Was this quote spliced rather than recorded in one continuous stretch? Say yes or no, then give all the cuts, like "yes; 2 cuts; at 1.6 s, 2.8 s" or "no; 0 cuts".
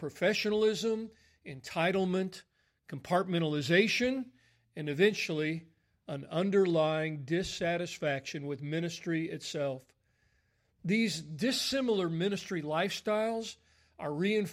no; 0 cuts